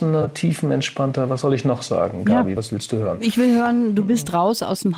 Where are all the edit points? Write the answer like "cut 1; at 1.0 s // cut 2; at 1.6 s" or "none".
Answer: none